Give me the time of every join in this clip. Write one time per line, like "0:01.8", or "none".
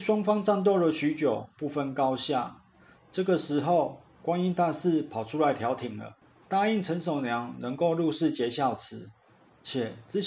0:04.1